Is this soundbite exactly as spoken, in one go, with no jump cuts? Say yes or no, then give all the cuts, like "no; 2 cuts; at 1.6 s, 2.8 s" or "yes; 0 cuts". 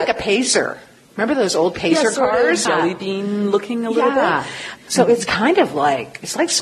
no; 2 cuts; at 2.7 s, 4.9 s